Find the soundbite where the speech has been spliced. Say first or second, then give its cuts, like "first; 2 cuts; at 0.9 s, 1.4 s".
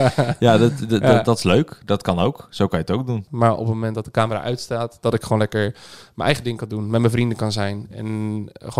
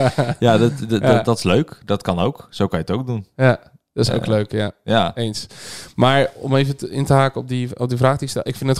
first; 1 cut; at 3.3 s